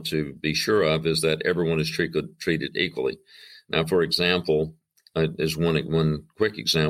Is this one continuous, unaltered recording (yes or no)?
yes